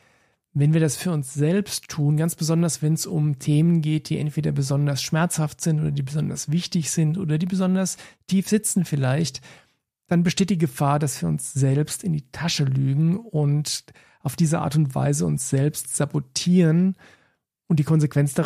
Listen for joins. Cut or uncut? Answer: uncut